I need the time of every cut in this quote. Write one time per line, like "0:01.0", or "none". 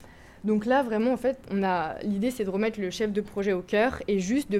0:01.4